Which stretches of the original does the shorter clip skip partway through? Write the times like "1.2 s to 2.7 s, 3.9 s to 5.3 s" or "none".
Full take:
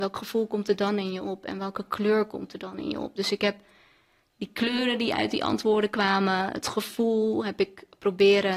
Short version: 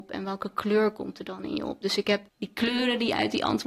3.6 s to 4.3 s